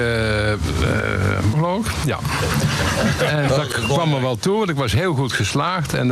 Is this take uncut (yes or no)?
no